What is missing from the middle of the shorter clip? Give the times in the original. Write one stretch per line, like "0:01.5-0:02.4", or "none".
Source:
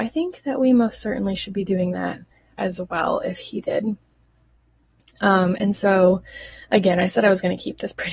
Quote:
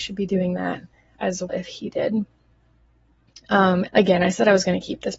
0:02.9-0:03.2
0:05.6-0:06.6